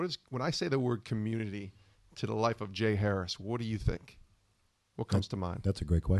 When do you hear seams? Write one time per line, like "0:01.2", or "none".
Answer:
none